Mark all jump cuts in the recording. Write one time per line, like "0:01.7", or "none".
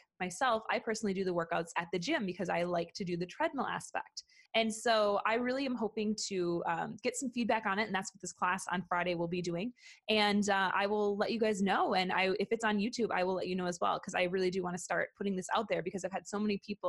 0:04.5